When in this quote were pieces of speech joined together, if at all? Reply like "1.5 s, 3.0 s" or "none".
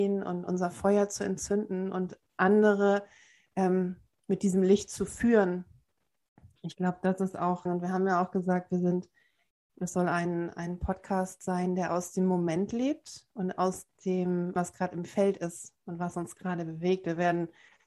7.7 s, 9.7 s, 14.6 s